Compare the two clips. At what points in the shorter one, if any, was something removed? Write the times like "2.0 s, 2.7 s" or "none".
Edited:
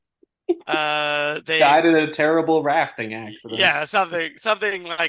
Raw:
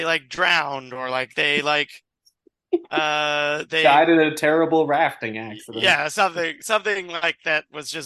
none